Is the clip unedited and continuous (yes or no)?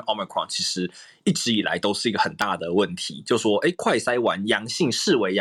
yes